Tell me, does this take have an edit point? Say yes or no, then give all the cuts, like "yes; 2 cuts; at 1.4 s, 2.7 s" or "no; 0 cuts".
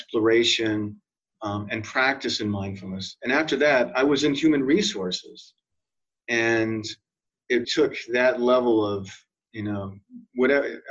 yes; 2 cuts; at 6.2 s, 7.6 s